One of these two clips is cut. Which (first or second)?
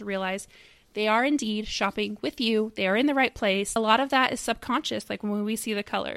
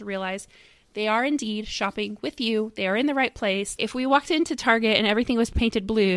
second